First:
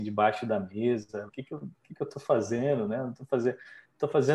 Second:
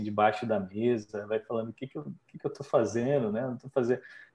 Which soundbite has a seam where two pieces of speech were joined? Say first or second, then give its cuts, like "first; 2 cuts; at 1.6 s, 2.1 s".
first; 1 cut; at 1.3 s